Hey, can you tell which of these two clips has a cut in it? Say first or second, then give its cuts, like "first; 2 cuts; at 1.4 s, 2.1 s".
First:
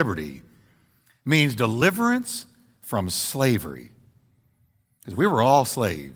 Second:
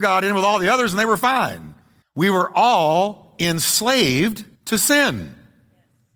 second; 2 cuts; at 2.0 s, 4.5 s